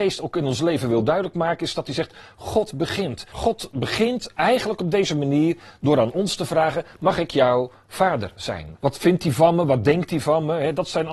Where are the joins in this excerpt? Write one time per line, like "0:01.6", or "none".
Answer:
0:03.3
0:08.7